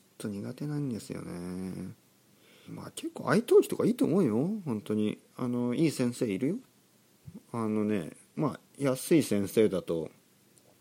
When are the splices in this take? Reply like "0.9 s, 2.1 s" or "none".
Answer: 2.7 s